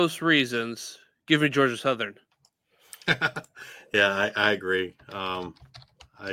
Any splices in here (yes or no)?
no